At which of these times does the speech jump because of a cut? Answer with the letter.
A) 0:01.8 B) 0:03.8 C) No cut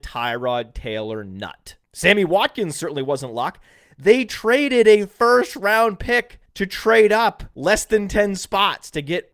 C